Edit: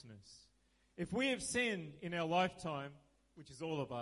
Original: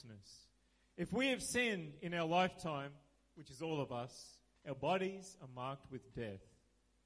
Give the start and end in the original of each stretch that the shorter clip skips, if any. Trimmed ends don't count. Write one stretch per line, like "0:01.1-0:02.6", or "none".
none

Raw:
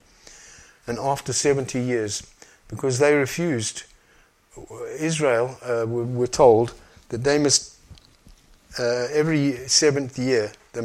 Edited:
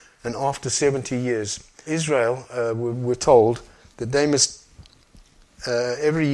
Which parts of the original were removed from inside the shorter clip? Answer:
0:02.5-0:05.0

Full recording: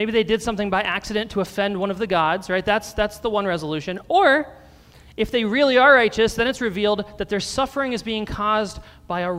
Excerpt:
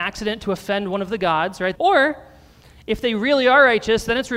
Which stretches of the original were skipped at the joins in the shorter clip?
0:02.6-0:04.1

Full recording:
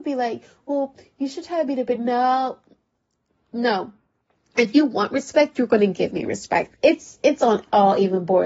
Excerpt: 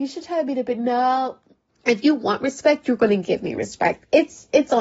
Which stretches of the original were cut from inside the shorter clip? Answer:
0:02.9-0:04.4

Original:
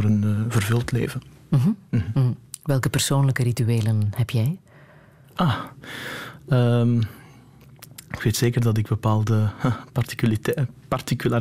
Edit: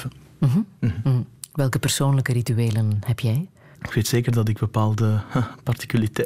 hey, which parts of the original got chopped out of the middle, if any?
0:04.9-0:08.0

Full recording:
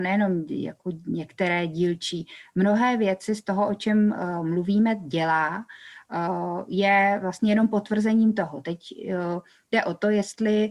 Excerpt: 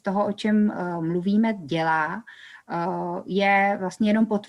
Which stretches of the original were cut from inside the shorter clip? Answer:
none

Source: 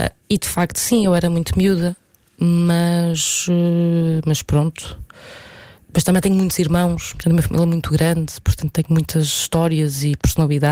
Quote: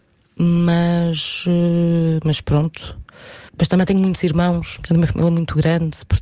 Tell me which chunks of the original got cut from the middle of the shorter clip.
0:05.5-0:05.8

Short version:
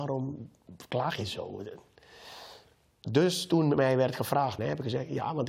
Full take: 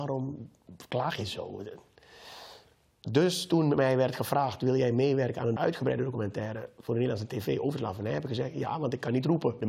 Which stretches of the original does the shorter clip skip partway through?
0:04.6-0:08.0

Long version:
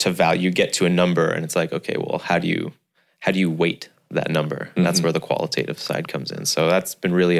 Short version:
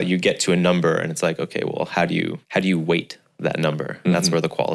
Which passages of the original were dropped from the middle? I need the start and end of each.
0:02.8-0:03.1

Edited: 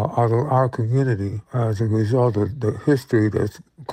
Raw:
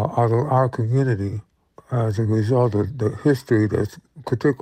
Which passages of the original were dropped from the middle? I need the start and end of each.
0:01.4-0:01.8

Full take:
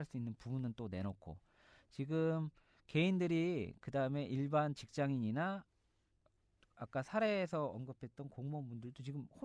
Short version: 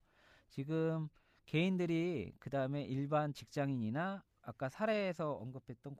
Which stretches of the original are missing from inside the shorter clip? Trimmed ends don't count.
0:05.7-0:06.7

